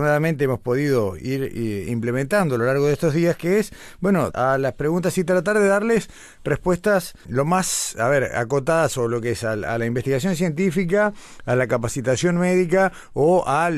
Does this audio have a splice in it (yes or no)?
yes